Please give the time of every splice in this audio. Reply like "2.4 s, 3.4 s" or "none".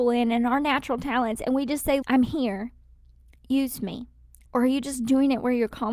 2.0 s, 4.5 s